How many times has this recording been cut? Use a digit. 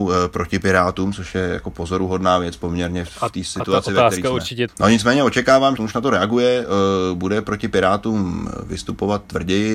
2